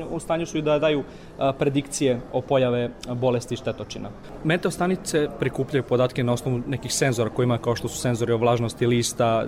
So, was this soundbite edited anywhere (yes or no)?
no